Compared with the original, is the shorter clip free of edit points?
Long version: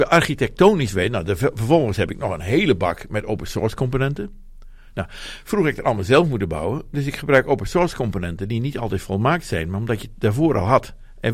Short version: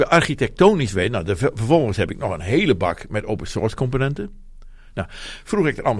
yes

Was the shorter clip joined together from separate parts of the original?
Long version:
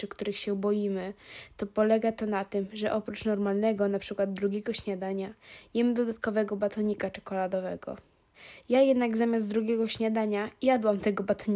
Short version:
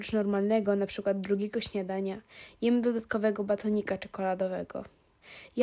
no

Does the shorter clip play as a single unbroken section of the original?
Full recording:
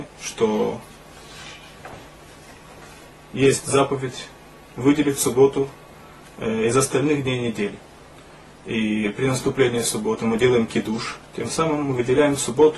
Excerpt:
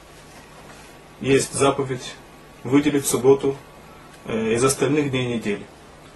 yes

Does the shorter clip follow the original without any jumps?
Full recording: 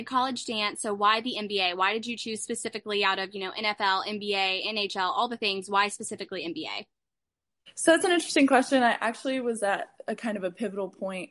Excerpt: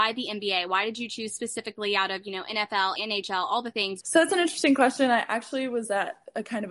no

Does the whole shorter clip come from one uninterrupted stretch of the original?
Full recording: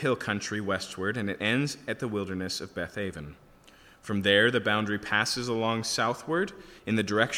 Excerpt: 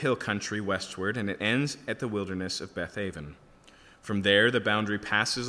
yes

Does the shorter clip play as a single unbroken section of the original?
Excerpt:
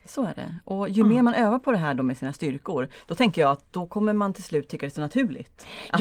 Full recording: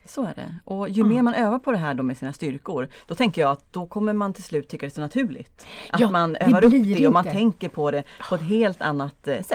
yes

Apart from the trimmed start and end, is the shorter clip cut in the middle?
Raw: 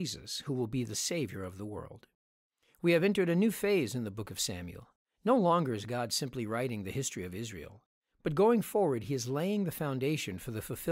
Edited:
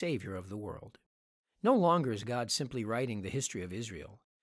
yes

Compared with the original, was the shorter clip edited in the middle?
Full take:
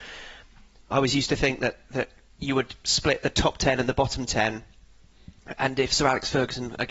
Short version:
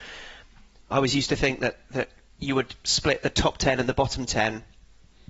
no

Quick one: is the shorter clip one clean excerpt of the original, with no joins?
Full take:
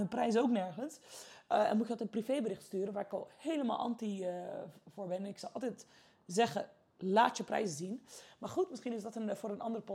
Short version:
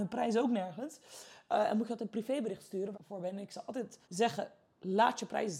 no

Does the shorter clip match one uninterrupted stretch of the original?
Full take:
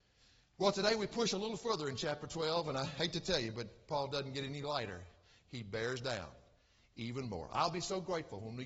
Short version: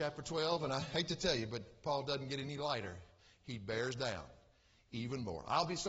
yes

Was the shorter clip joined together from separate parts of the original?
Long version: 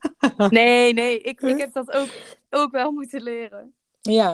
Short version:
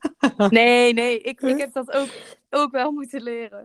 no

